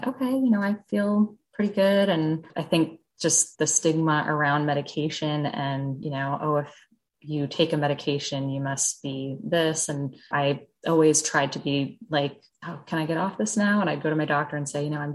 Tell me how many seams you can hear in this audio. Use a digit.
0